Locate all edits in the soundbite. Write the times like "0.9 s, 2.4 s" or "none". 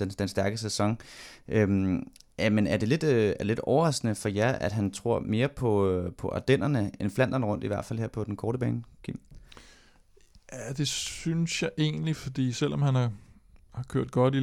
7.0 s